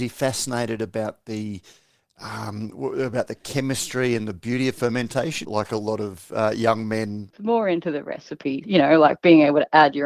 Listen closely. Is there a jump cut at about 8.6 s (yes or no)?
yes